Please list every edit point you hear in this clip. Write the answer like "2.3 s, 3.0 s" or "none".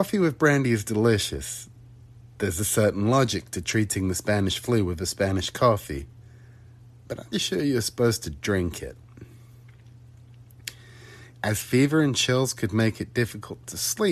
7.3 s, 11.3 s